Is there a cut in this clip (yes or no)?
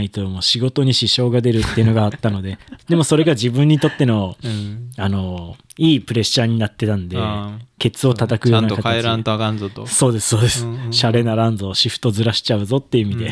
no